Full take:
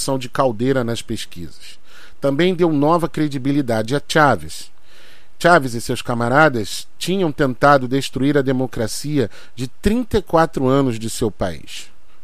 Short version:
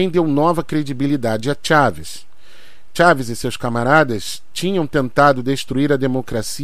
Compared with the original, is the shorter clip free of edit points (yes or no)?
yes